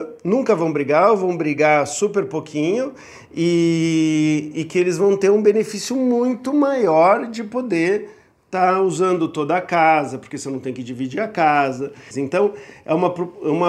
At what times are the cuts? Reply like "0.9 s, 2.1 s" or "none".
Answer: 12.1 s